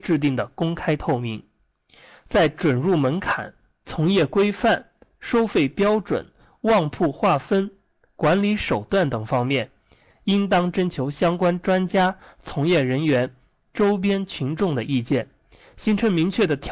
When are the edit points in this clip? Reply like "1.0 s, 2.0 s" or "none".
none